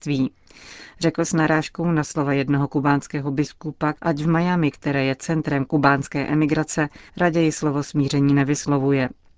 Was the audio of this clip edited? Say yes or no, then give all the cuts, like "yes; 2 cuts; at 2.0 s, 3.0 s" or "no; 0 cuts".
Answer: yes; 2 cuts; at 3.9 s, 7.1 s